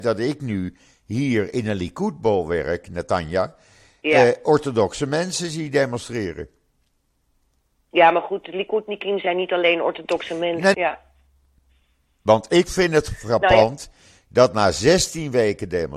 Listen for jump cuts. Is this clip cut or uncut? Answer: cut